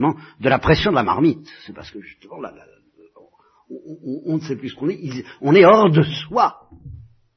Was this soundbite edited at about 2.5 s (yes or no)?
no